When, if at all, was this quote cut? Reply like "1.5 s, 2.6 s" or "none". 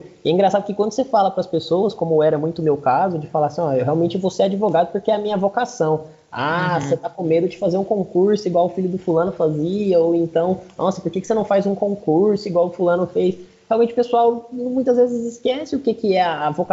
none